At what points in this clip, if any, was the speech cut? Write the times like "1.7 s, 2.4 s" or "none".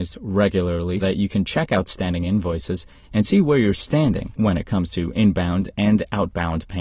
1.0 s, 3.0 s